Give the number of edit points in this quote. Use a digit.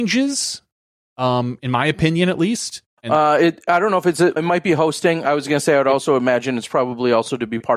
2